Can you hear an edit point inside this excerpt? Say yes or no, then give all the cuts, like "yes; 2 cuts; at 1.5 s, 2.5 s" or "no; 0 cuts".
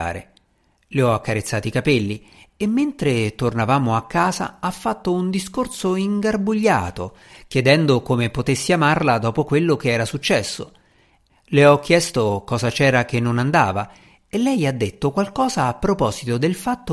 yes; 1 cut; at 11.3 s